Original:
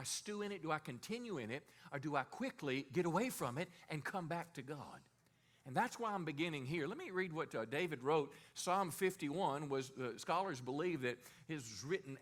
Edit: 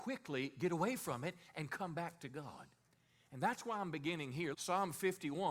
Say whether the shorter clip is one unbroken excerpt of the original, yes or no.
no